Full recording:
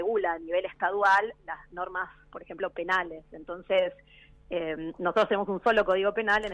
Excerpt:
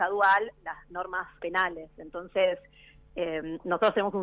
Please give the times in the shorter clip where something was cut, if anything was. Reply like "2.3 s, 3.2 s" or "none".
1.4 s